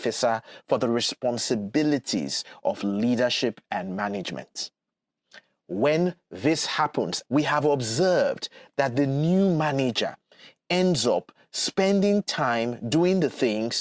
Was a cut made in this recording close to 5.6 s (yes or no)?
no